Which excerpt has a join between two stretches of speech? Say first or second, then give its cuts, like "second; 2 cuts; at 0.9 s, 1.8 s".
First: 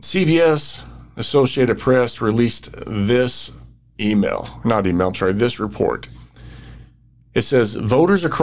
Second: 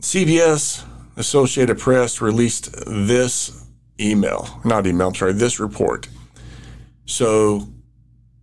second; 1 cut; at 7.1 s